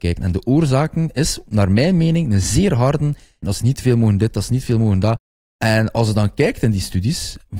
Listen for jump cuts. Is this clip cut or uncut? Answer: cut